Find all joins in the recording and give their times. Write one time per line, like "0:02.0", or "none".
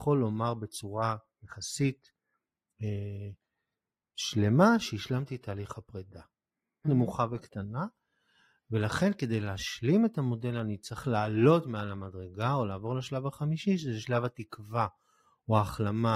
0:06.8

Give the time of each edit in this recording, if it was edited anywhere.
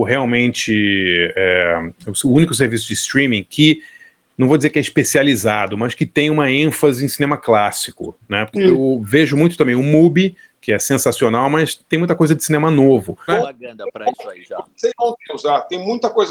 0:08.5
0:13.3

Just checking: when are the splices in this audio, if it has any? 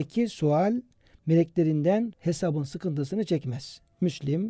0:02.1

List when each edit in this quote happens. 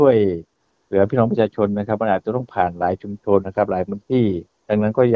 0:03.4

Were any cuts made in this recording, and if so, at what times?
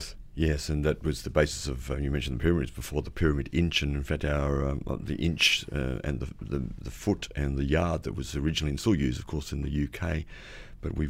none

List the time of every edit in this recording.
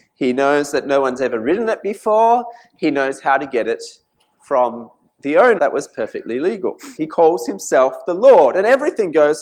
0:05.6
0:07.0

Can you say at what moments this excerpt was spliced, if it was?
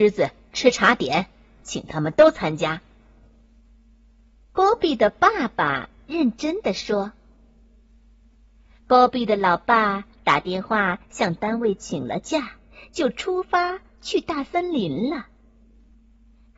none

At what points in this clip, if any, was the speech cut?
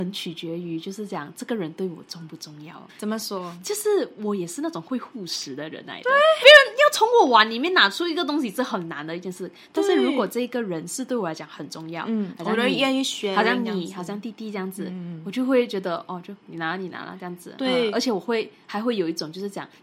0:02.9
0:06.4

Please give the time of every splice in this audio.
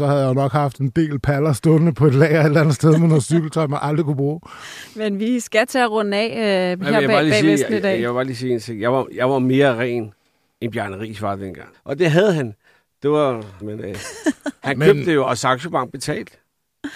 0:11.7
0:13.6

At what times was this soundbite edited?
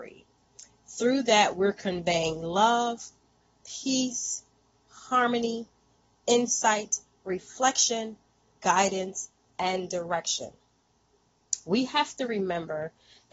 none

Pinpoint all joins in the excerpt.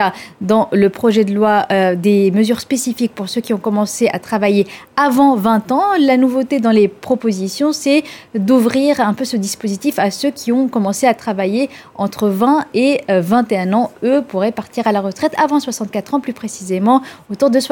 none

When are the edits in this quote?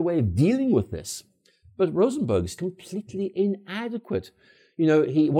0:02.6

